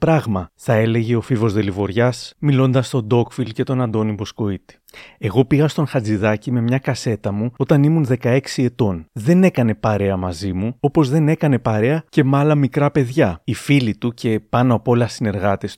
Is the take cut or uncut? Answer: cut